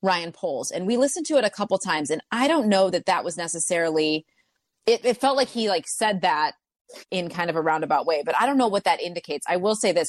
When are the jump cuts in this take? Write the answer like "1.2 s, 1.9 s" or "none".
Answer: none

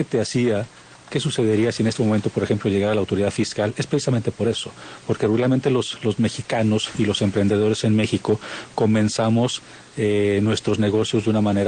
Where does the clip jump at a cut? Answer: none

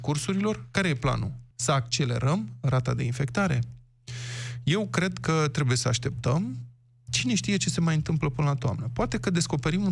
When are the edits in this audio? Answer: 1.5 s

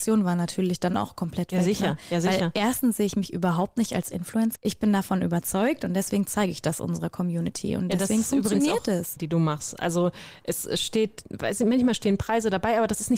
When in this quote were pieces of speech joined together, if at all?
4.6 s, 9.2 s

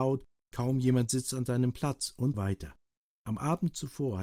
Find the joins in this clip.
2.3 s

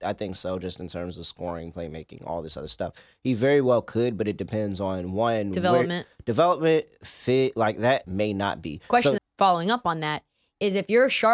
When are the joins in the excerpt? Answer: 8.0 s, 9.2 s

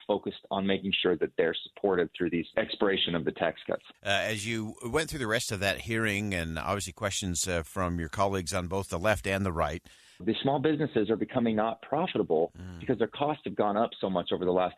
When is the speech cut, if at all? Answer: 3.9 s, 10.2 s

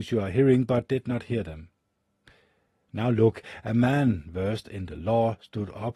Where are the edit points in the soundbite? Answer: none

